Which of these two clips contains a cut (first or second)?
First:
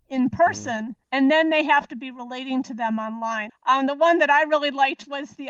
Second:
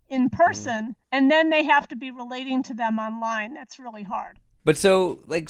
first